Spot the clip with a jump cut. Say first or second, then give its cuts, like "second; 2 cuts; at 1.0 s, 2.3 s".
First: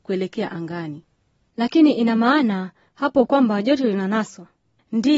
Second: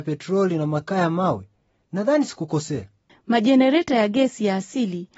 second; 1 cut; at 3.1 s